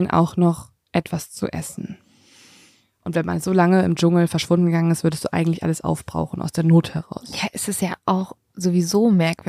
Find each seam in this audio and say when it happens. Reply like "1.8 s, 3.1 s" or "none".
none

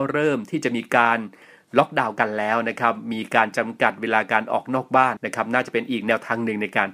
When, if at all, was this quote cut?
5.2 s

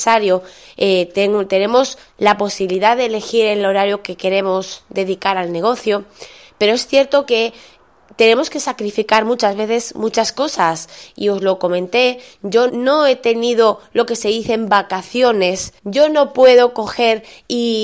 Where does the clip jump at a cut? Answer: 12.7 s, 15.8 s

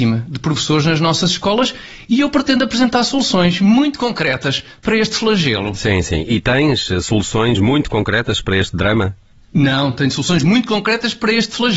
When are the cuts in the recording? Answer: none

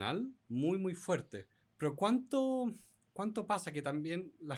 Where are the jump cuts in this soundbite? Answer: 1.6 s

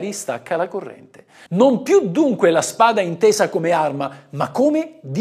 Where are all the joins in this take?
1.5 s

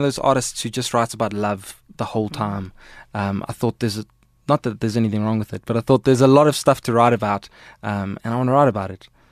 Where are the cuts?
none

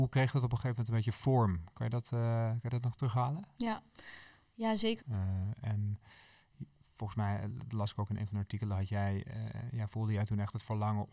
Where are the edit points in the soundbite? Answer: 5.0 s

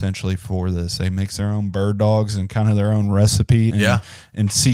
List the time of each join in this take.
3.7 s

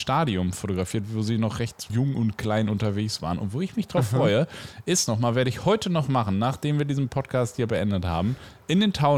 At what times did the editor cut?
1.9 s

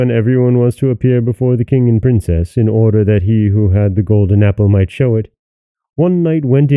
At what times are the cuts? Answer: none

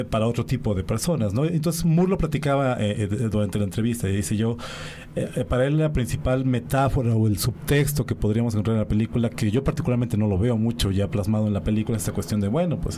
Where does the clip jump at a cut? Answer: none

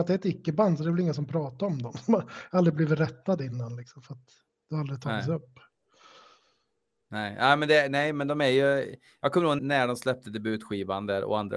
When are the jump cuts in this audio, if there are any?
9.6 s

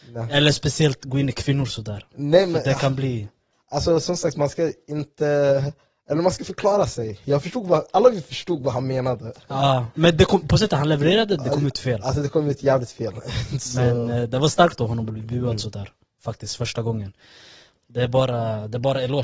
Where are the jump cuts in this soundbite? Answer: none

